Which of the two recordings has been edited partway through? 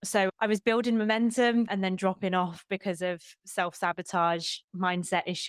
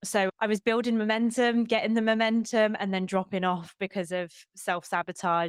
first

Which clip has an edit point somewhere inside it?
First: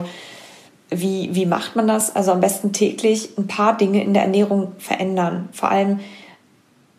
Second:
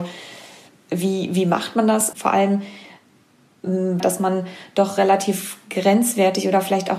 second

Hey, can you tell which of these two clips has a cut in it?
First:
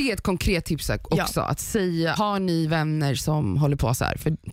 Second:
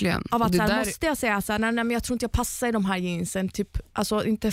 first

